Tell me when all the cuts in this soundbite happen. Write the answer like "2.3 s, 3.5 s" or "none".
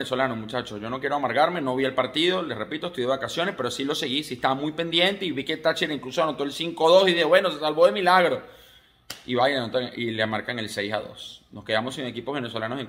none